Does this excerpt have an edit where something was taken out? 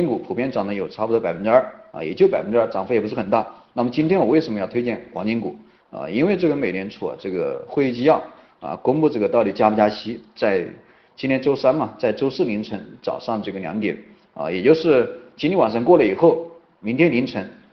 no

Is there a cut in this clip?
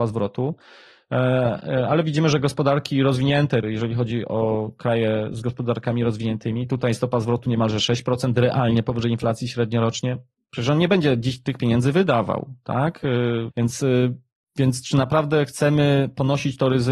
yes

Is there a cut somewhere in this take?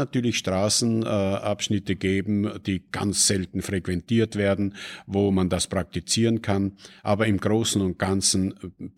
no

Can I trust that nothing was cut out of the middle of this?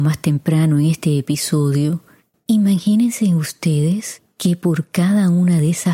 no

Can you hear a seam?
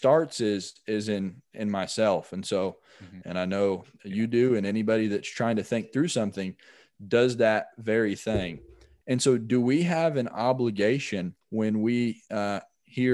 yes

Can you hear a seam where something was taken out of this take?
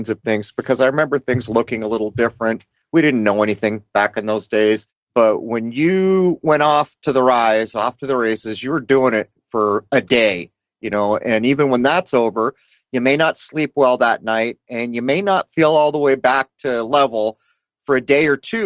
no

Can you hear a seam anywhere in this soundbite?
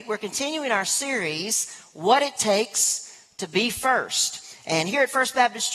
no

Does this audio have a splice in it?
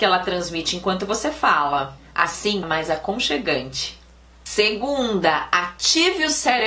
yes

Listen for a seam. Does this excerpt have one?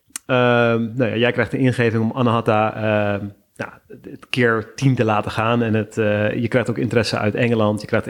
no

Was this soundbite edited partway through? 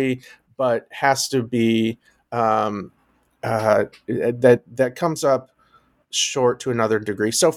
no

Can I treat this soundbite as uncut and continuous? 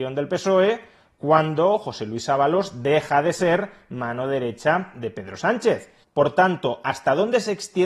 no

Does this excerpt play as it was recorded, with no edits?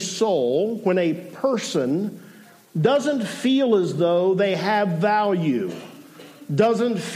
yes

